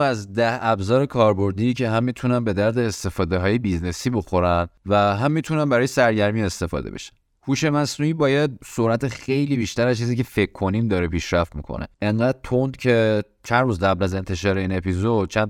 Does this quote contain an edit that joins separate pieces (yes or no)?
yes